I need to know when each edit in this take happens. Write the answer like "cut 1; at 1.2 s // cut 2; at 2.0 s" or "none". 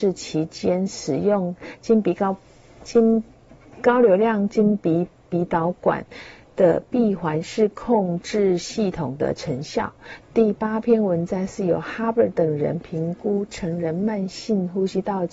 cut 1; at 10.2 s